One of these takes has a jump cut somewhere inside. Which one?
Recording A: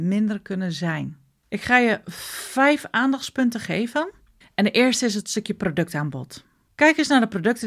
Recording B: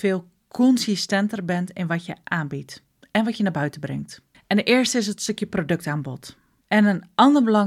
B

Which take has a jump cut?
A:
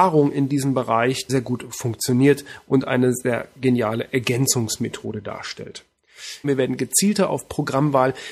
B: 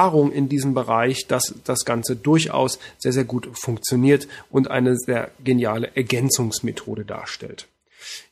A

